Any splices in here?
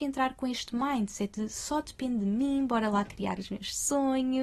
no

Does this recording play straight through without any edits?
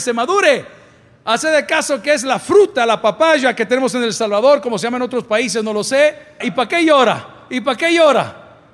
no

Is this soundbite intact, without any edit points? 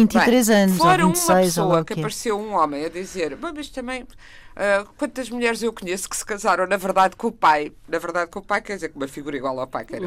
yes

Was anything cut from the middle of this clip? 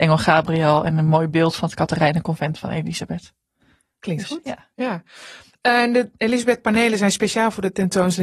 no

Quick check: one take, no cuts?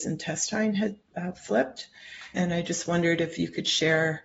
no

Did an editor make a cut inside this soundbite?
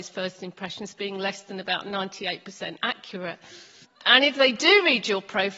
yes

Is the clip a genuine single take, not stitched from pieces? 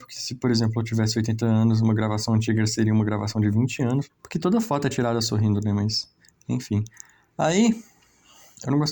no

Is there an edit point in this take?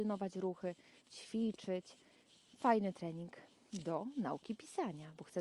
yes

